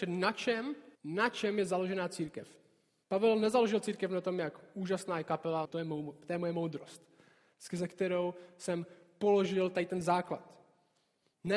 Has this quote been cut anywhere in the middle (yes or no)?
yes